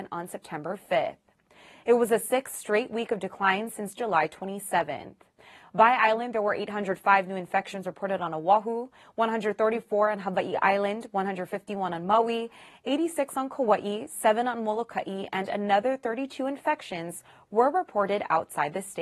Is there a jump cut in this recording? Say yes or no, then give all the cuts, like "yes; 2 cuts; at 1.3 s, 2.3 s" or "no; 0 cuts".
no; 0 cuts